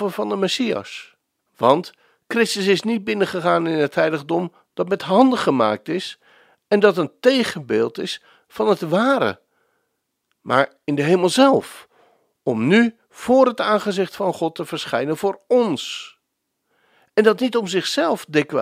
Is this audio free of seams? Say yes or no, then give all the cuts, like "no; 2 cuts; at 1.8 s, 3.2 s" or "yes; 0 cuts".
no; 1 cut; at 1.4 s